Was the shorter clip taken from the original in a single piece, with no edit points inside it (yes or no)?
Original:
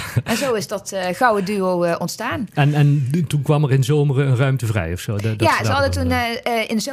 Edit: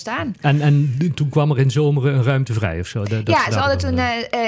yes